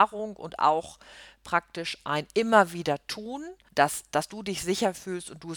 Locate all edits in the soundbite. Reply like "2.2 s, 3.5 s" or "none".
3.7 s